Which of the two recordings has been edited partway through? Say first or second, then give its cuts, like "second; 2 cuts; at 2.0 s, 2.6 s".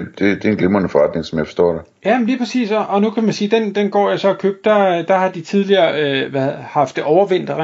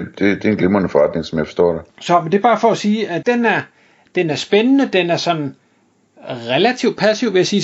second; 2 cuts; at 1.9 s, 3.2 s